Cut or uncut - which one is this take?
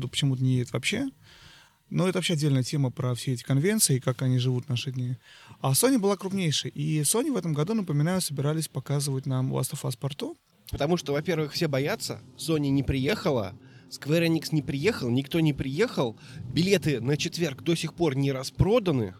cut